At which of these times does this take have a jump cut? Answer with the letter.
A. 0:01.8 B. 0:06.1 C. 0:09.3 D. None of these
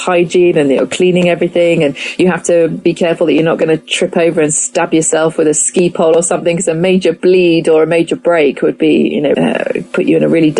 C